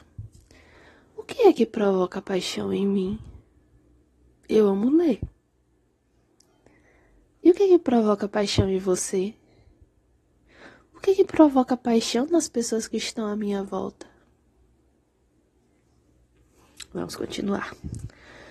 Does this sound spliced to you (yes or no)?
no